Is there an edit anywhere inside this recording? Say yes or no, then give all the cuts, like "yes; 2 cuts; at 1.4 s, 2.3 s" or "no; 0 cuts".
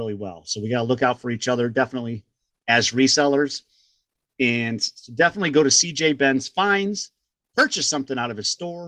no; 0 cuts